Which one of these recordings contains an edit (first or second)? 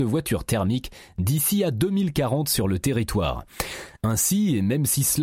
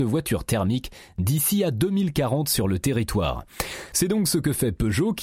second